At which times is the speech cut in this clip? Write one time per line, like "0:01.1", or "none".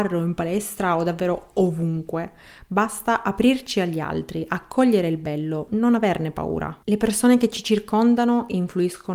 0:06.8